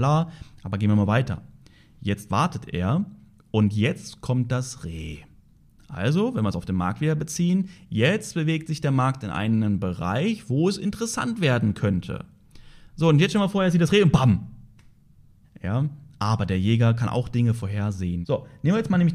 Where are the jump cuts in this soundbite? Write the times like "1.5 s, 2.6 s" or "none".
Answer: 15.4 s, 18.2 s